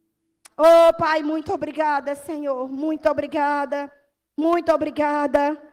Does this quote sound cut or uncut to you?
uncut